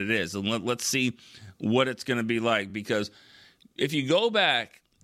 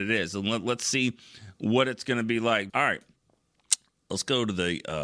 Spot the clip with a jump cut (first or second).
second